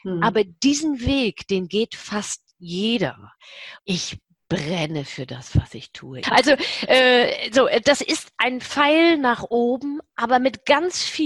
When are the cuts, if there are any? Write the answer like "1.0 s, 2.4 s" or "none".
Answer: 3.8 s, 6.2 s